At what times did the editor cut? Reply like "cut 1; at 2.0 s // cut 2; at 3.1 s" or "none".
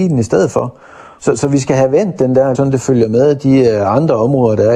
cut 1; at 1.2 s // cut 2; at 2.5 s

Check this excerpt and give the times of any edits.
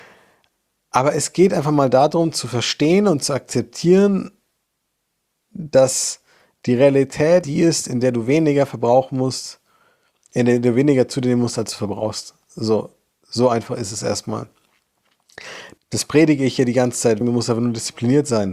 cut 1; at 7.4 s // cut 2; at 15.8 s // cut 3; at 17.2 s

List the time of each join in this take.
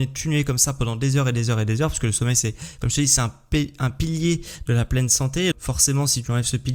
cut 1; at 5.5 s

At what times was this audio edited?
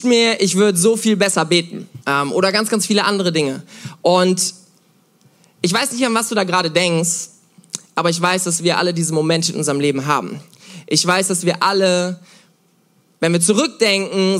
cut 1; at 2.0 s

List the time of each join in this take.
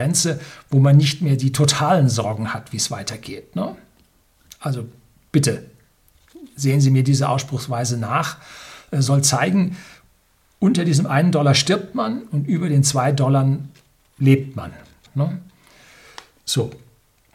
cut 1; at 15.1 s

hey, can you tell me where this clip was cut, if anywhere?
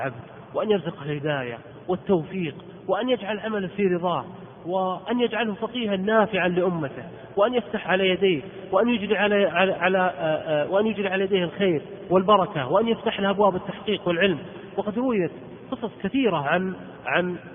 cut 1; at 7.8 s

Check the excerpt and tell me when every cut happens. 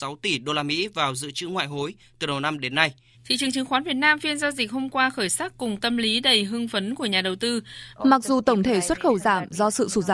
cut 1; at 3.1 s // cut 2; at 8.0 s

